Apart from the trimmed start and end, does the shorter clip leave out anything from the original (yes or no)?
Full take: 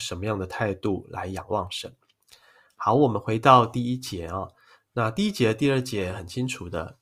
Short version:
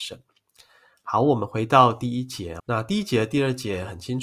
yes